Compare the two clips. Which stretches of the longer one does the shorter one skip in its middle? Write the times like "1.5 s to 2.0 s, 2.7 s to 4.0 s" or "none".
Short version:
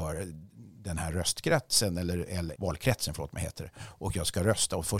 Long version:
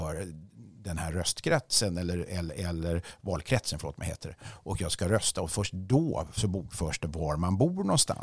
2.5 s to 3.2 s